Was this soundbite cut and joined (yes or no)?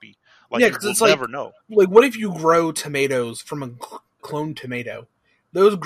yes